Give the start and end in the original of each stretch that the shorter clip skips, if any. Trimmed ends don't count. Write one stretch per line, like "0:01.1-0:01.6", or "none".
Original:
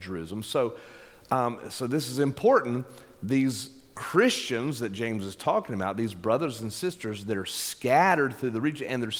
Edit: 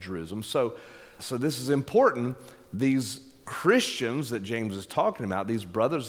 0:01.2-0:01.7